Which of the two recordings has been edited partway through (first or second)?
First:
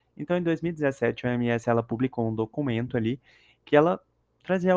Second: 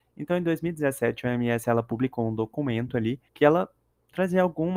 second